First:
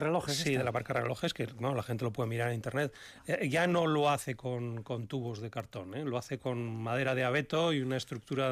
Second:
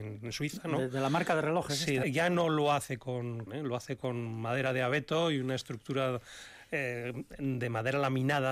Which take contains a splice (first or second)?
second